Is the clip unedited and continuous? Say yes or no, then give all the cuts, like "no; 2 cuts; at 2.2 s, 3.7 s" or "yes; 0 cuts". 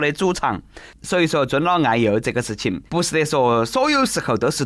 no; 2 cuts; at 1.0 s, 2.9 s